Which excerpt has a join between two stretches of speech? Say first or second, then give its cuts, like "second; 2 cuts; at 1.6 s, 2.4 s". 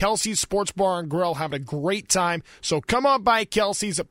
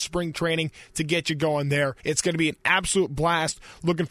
second; 1 cut; at 2.0 s